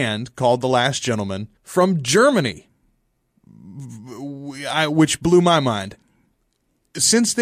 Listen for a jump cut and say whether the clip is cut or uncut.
cut